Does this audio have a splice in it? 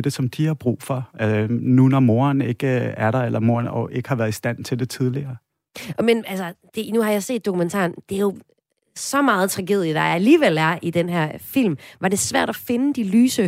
no; 0 cuts

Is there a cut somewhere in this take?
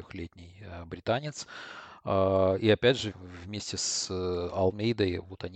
yes; 1 cut; at 3.1 s

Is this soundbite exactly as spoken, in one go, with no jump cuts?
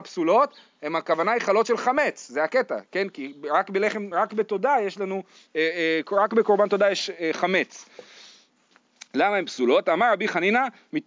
yes; 0 cuts

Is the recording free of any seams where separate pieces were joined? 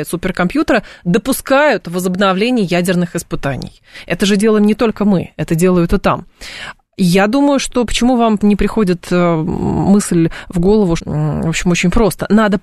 no; 2 cuts; at 8.4 s, 11.0 s

